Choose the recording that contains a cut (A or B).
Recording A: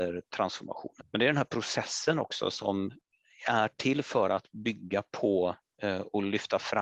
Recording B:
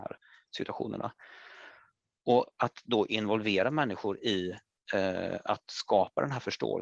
A